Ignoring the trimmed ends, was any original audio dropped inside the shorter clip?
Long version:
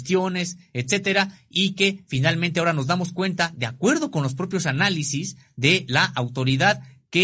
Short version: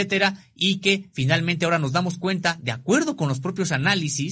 no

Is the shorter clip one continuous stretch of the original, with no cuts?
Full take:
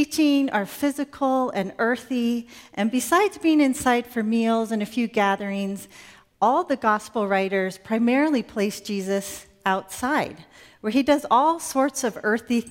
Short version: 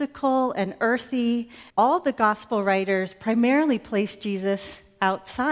no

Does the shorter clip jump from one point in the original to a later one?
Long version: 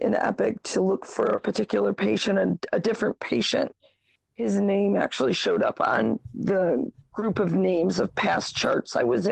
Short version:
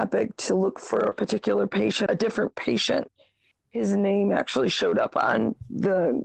yes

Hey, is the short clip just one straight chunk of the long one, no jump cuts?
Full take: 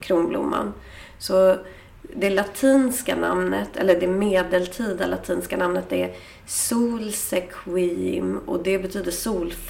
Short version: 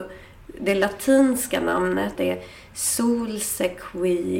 no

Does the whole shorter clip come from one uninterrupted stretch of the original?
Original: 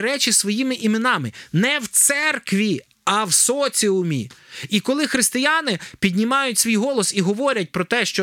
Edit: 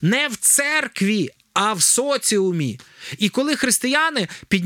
yes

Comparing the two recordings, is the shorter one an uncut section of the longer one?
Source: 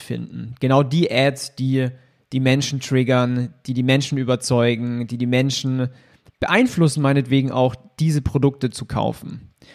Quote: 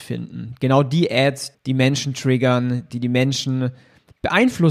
no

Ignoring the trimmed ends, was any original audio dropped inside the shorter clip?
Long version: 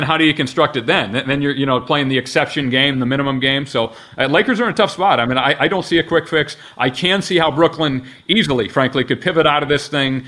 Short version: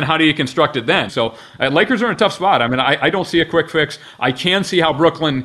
yes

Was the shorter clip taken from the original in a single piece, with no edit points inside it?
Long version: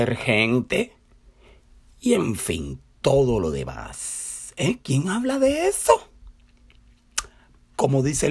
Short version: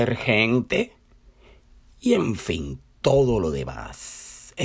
yes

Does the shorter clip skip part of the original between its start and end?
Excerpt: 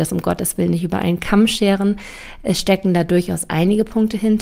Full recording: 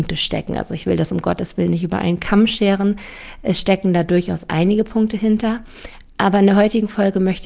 no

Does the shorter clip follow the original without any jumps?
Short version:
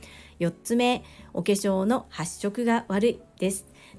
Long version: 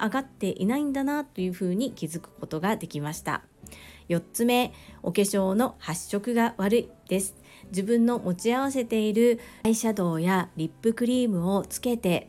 yes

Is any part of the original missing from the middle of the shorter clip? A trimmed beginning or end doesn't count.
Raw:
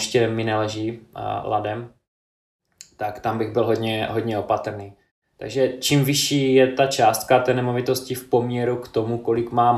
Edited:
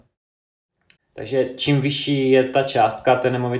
yes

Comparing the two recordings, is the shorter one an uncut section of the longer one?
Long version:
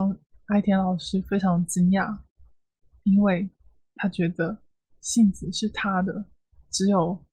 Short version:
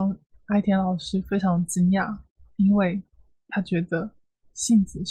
no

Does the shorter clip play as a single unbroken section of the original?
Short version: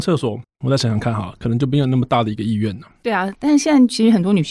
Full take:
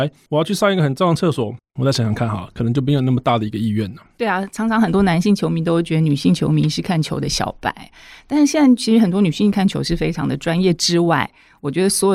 no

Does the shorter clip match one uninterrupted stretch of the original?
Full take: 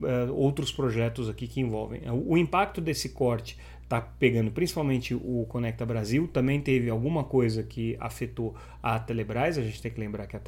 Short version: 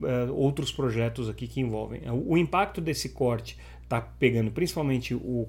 yes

